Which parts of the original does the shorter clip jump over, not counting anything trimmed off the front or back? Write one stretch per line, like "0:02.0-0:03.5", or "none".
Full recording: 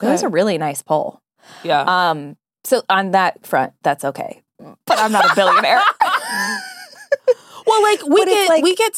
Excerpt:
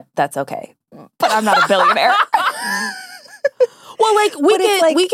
none